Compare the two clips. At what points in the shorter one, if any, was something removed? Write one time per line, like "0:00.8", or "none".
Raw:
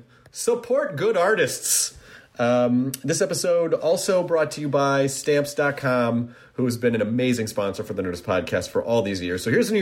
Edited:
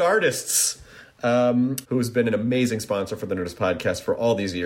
0:01.8